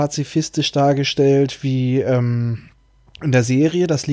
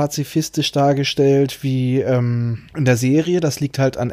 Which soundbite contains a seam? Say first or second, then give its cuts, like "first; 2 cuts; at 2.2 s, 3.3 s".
second; 1 cut; at 2.7 s